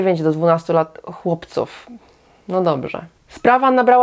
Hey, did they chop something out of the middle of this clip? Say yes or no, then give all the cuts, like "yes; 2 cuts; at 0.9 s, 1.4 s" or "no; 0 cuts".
no; 0 cuts